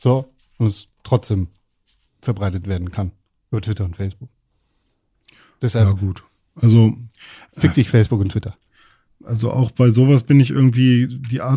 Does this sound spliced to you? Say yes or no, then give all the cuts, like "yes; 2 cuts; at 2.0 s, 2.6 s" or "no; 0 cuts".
no; 0 cuts